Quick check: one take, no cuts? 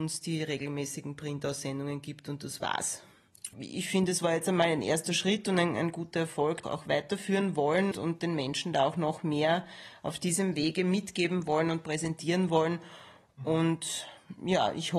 no; 3 cuts; at 3.5 s, 6.6 s, 7.9 s

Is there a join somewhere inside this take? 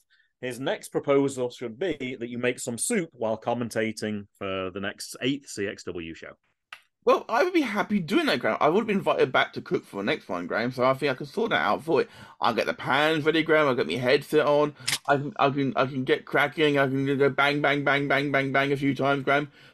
yes; 1 cut; at 18.1 s

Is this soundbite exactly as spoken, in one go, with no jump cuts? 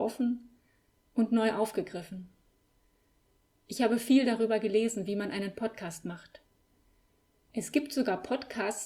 yes; 0 cuts

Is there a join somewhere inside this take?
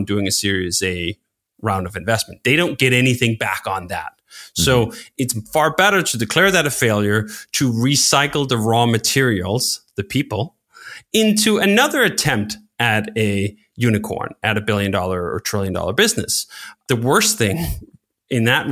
no; 0 cuts

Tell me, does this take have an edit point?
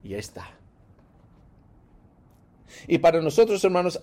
no; 0 cuts

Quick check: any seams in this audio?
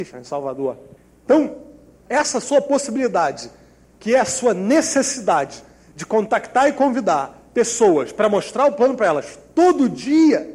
no; 0 cuts

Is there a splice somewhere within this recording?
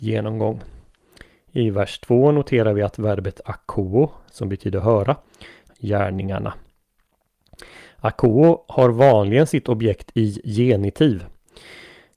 yes; 1 cut; at 5.7 s

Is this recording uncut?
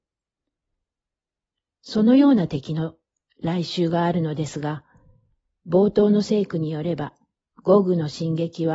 yes; 0 cuts

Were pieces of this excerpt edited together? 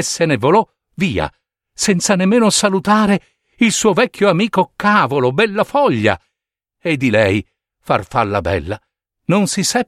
no; 0 cuts

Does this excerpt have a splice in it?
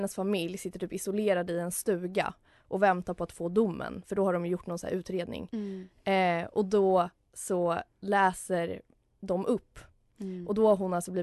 no; 0 cuts

